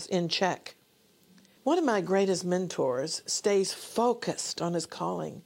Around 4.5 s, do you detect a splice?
no; 1 cut; at 1.6 s

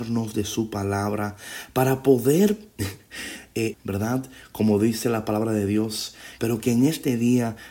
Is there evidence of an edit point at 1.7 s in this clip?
no; 2 cuts; at 3.7 s, 6.4 s

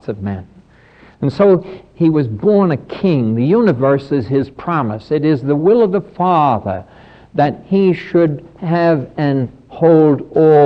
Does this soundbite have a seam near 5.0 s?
no; 0 cuts

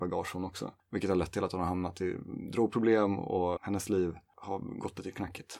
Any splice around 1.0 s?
no; 1 cut; at 3.6 s

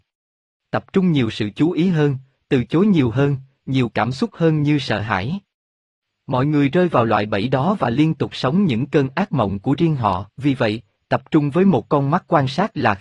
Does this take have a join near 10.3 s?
yes; 1 cut; at 10.3 s

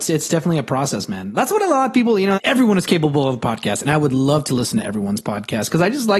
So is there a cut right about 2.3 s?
yes; 1 cut; at 2.3 s

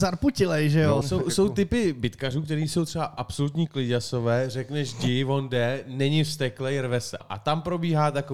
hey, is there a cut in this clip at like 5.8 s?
no; 2 cuts; at 1.0 s, 7.2 s

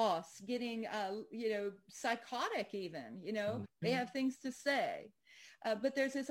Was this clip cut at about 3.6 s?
yes; 1 cut; at 3.6 s

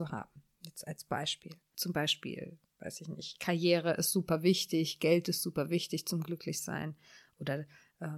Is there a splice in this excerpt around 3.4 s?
no; 1 cut; at 1.7 s

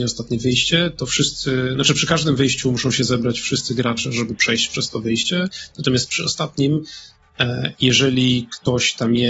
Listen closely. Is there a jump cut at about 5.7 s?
no; 0 cuts

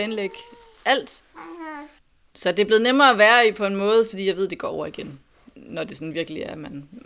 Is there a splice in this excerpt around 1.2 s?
yes; 1 cut; at 1.2 s

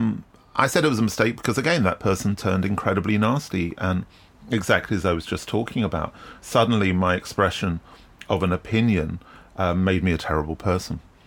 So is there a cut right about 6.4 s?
no; 0 cuts

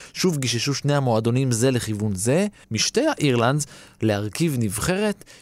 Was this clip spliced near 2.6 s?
yes; 1 cut; at 2.6 s

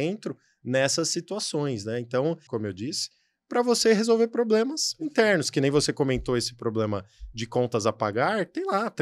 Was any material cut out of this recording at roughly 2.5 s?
yes; 1 cut; at 2.5 s

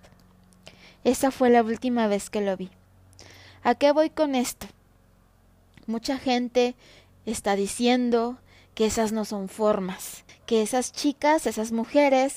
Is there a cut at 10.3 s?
yes; 1 cut; at 10.3 s

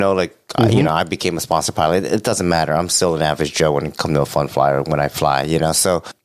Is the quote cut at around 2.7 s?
no; 0 cuts

